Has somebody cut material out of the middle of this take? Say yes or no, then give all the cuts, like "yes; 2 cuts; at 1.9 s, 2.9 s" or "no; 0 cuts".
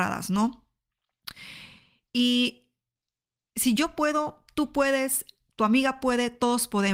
no; 0 cuts